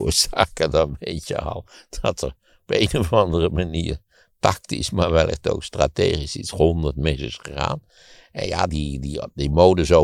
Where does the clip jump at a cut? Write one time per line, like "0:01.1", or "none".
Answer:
0:08.7